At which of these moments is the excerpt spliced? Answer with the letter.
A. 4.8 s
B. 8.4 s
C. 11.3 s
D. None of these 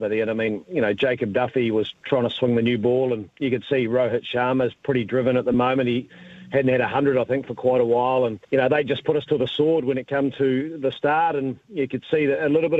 B